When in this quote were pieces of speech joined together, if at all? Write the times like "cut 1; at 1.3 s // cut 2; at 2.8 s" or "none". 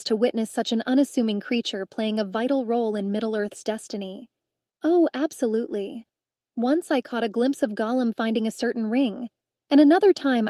cut 1; at 4.7 s